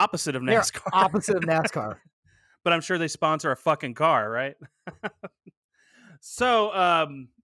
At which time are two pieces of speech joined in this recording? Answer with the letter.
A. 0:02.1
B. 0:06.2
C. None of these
C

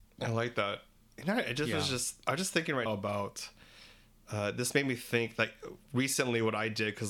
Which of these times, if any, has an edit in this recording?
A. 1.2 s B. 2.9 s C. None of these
B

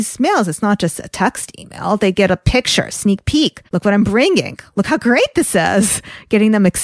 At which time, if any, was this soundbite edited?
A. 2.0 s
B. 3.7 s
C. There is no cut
B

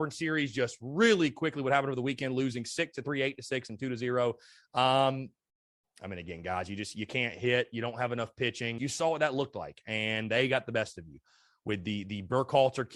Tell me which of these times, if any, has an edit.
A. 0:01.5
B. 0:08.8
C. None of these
B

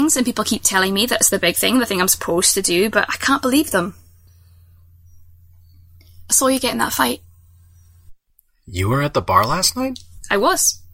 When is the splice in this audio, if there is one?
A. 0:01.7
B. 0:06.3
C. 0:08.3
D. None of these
D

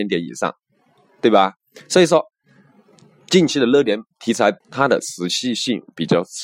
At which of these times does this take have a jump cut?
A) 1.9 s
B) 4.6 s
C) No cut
B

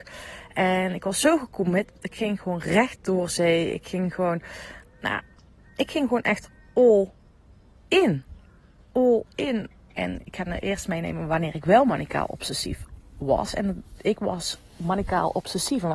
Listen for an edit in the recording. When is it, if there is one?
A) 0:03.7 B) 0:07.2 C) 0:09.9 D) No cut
C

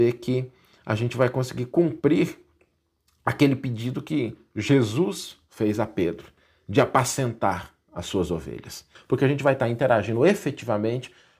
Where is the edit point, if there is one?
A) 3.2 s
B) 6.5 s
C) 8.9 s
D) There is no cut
C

